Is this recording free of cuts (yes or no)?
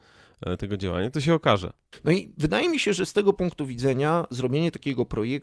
yes